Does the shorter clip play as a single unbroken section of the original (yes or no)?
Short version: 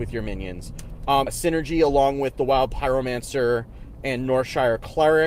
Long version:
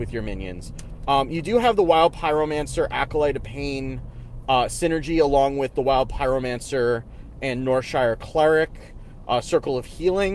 no